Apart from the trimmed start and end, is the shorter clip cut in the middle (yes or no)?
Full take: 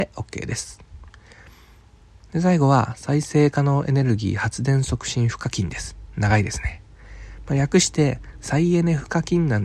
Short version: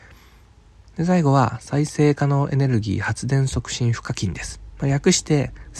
yes